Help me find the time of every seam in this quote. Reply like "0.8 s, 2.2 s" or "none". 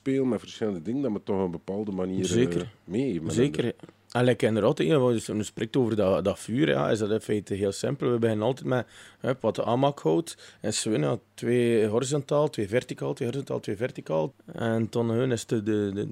10.6 s, 14.3 s